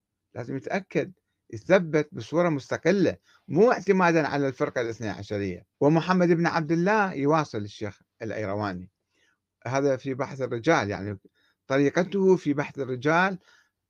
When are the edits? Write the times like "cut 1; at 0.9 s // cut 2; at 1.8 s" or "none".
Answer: cut 1; at 5.7 s